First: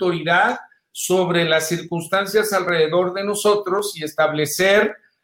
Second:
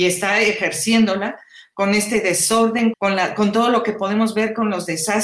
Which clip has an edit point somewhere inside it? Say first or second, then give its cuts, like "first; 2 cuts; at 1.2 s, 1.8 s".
second; 1 cut; at 2.9 s